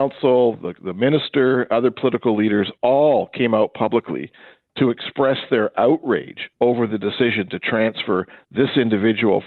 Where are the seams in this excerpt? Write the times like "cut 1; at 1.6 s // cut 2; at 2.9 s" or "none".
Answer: none